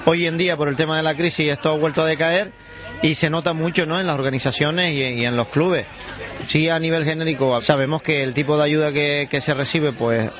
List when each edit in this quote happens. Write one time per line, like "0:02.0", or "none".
0:06.4
0:07.6